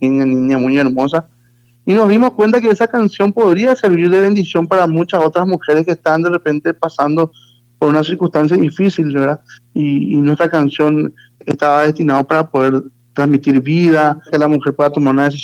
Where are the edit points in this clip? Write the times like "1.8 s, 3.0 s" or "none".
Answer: 9.5 s, 14.3 s